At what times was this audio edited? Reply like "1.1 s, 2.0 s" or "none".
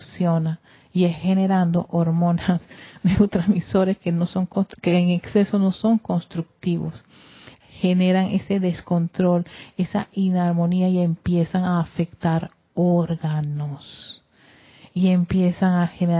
none